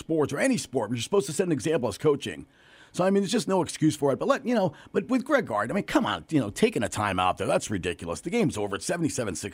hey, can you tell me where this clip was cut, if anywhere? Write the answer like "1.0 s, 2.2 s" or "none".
none